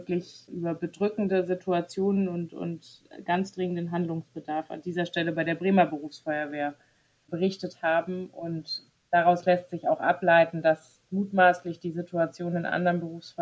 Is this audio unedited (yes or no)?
yes